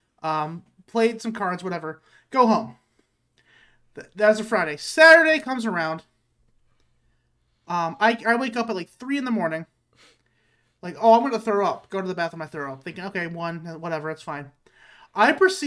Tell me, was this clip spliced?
no; 0 cuts

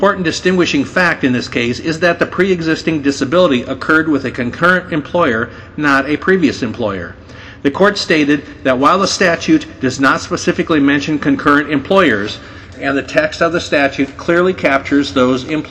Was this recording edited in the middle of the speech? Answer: yes; 1 cut; at 12.7 s

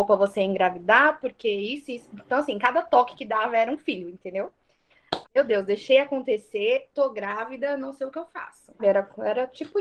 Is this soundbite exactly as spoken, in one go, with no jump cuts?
no; 2 cuts; at 5.2 s, 8.8 s

